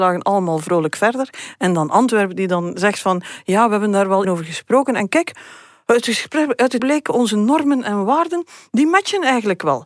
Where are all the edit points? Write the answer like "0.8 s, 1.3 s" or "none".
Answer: 4.2 s, 6.8 s